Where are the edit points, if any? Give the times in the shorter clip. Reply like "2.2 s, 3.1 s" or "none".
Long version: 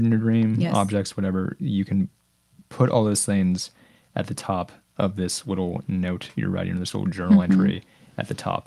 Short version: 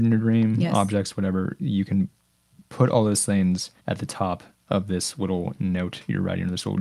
3.8 s